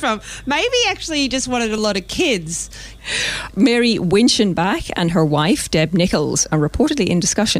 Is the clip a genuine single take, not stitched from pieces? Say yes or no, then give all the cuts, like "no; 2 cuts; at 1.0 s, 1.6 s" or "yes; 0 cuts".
no; 1 cut; at 3.0 s